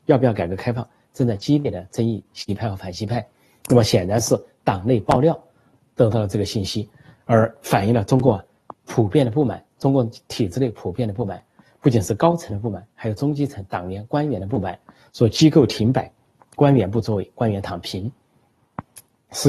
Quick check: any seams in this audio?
no; 0 cuts

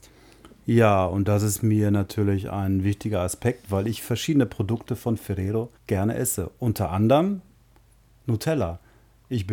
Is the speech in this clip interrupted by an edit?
yes; 1 cut; at 5.8 s

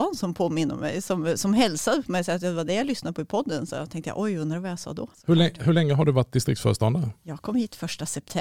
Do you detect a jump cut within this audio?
yes; 1 cut; at 5.1 s

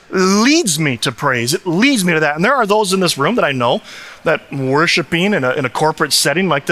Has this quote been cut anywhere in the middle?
no; 0 cuts

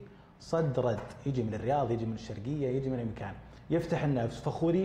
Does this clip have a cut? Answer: no; 0 cuts

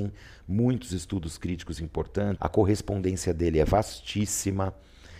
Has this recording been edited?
yes; 1 cut; at 2.4 s

